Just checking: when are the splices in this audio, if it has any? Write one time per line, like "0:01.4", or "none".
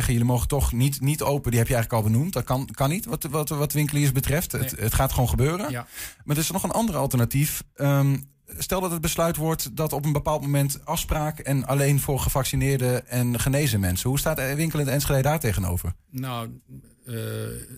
none